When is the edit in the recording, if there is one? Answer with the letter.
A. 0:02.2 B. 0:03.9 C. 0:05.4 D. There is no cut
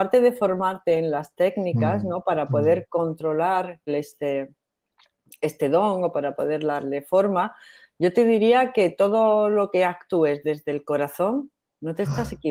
B